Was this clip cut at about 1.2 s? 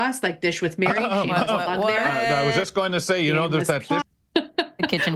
no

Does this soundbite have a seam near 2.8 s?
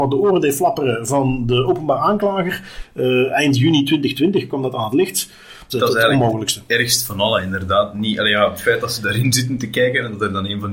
yes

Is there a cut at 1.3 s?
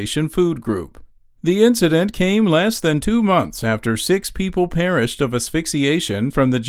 no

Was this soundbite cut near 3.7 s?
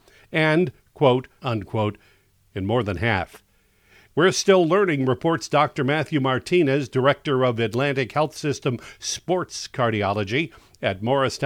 no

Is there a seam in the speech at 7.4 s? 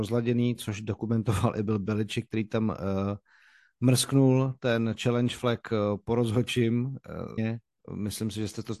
yes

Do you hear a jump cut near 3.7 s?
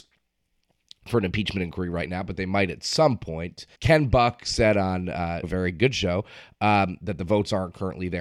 yes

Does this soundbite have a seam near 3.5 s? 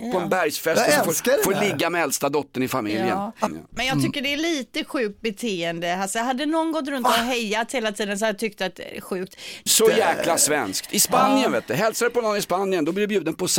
yes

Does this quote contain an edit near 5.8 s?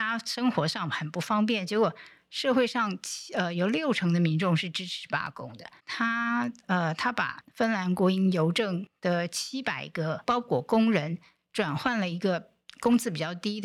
yes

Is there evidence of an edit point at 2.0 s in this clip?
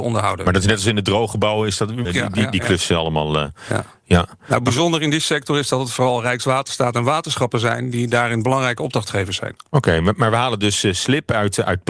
yes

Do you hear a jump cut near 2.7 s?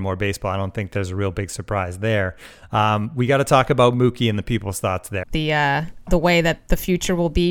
no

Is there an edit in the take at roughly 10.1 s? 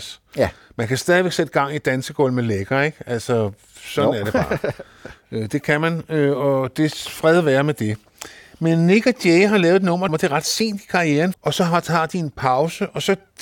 yes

